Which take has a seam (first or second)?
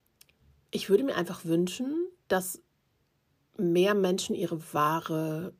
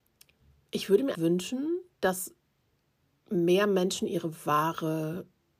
second